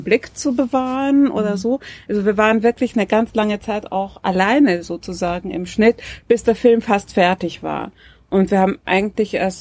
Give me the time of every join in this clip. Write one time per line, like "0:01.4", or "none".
none